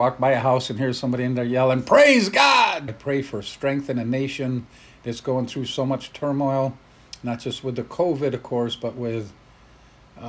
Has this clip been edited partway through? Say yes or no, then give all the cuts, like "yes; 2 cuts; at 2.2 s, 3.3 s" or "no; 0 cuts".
yes; 1 cut; at 2.9 s